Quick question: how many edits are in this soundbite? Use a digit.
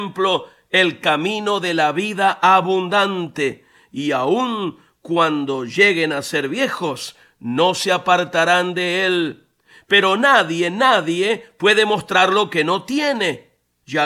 0